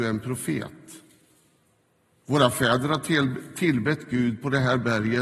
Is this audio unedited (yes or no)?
yes